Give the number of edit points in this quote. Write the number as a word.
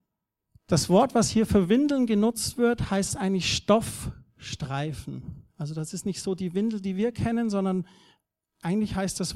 zero